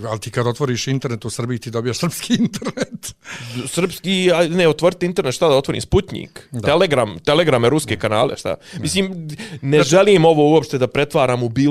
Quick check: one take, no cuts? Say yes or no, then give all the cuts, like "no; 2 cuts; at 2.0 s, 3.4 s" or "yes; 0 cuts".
yes; 0 cuts